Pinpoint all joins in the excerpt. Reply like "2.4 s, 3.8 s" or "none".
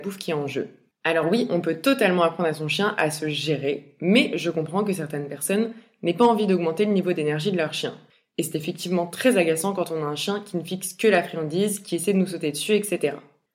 none

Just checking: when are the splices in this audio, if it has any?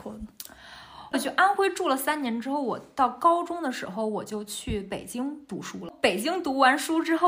1.1 s

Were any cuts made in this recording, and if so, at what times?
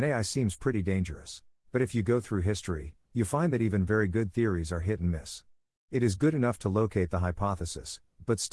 1.6 s

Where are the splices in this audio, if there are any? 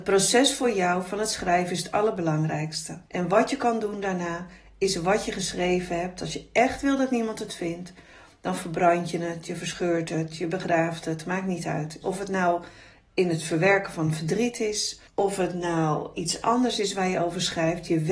3.1 s, 12.0 s, 15.1 s

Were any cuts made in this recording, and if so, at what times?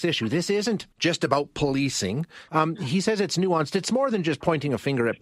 0.9 s, 2.5 s

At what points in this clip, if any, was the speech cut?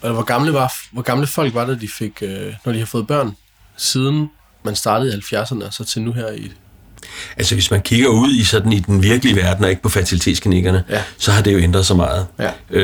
none

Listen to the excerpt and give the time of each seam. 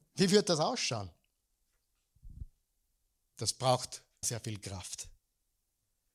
4.2 s

